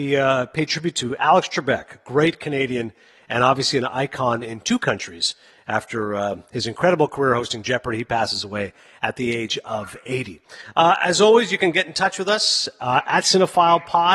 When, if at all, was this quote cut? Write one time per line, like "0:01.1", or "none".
none